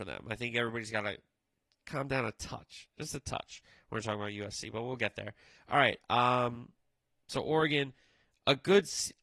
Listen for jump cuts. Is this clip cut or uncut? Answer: uncut